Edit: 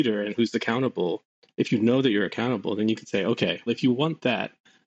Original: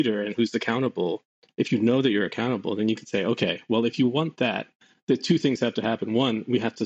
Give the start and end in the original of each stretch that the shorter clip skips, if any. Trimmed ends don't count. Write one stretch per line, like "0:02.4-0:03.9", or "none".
0:03.7-0:03.8